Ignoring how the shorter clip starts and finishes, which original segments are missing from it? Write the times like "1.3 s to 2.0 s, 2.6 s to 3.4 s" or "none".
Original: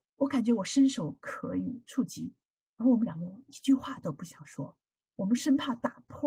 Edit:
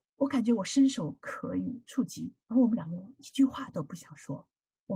2.4 s to 2.7 s